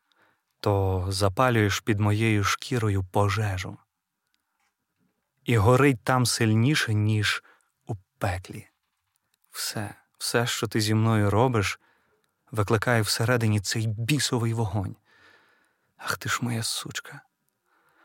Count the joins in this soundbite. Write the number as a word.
zero